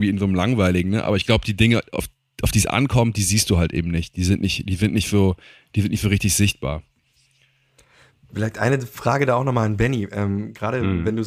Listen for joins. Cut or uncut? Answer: uncut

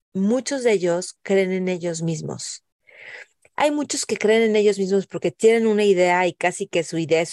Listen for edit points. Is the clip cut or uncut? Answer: uncut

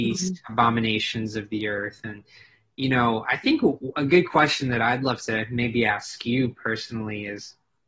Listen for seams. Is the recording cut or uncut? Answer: uncut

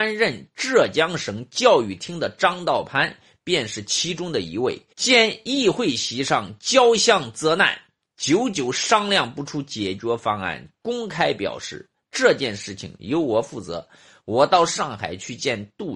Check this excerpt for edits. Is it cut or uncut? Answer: cut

